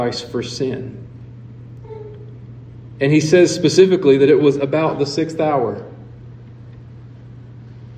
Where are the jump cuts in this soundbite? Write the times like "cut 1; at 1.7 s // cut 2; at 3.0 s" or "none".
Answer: none